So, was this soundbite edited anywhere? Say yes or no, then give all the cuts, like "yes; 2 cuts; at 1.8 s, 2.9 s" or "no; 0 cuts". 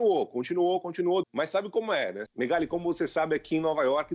yes; 2 cuts; at 1.2 s, 2.3 s